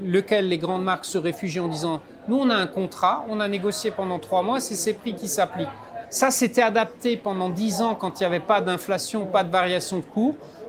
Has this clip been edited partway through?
yes; 1 cut; at 6.0 s

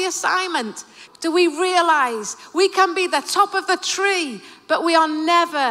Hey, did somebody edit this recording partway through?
yes; 1 cut; at 1.1 s

